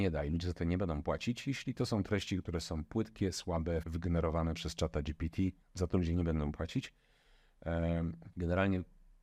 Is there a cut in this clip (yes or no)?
yes